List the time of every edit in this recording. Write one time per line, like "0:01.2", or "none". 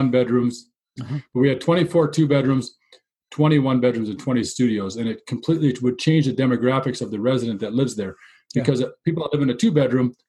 0:01.0